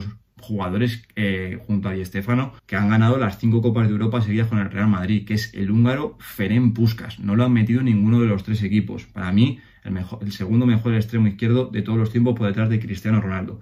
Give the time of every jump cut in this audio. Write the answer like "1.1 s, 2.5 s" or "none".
2.6 s